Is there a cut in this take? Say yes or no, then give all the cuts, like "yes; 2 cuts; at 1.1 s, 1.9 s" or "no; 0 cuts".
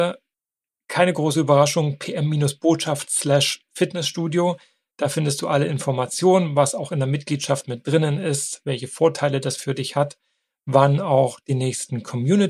no; 0 cuts